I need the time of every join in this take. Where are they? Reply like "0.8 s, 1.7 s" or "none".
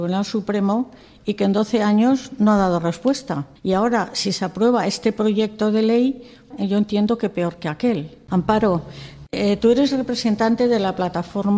3.6 s, 6.5 s, 8.3 s